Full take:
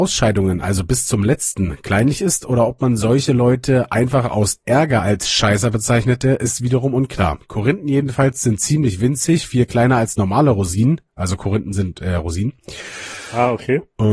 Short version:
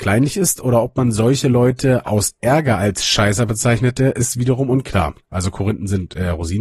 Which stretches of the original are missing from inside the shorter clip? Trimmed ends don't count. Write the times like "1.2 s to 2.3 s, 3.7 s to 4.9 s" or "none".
3.9 s to 4.3 s, 7.5 s to 11.1 s